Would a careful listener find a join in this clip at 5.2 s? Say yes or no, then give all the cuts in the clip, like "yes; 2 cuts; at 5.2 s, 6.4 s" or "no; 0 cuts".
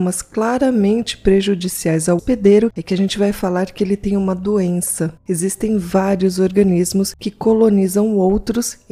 no; 1 cut; at 2.2 s